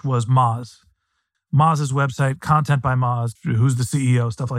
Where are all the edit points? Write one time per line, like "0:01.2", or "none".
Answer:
0:01.3
0:03.4

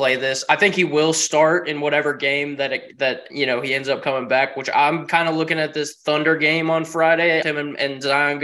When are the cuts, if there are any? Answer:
0:07.4

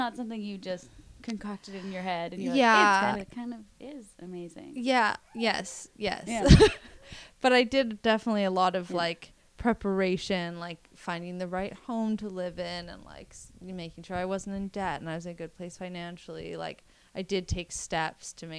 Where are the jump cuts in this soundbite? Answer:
0:03.1

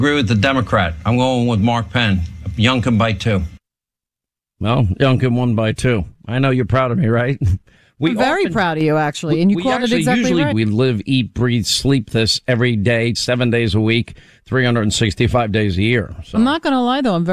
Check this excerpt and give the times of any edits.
0:10.5
0:13.1

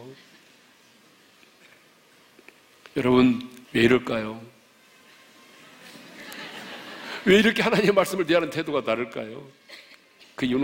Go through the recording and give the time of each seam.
0:03.6

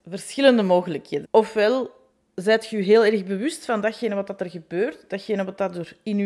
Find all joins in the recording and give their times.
0:01.2

